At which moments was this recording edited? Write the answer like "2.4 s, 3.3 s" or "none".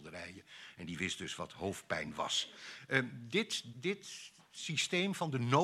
3.7 s